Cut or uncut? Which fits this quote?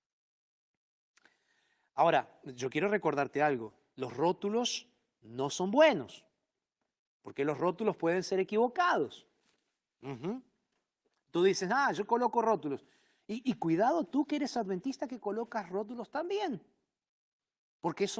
uncut